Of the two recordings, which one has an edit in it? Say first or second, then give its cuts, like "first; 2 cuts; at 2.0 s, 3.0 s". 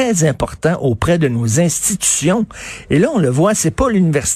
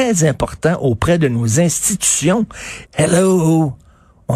second; 1 cut; at 2.9 s